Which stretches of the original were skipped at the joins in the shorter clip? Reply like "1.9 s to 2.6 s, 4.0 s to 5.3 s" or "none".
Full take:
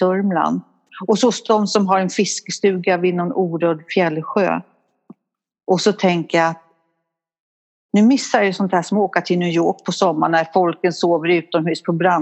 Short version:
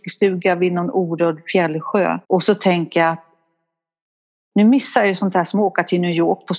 4.7 s to 5.6 s